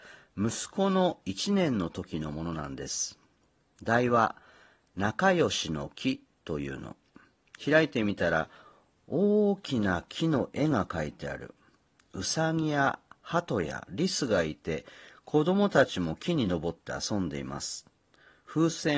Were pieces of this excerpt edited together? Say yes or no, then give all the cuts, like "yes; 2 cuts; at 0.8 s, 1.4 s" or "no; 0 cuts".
no; 0 cuts